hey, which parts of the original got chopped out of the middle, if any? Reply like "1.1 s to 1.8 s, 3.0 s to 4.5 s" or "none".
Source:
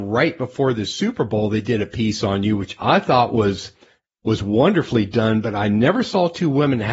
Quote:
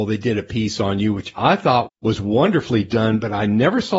3.3 s to 4.1 s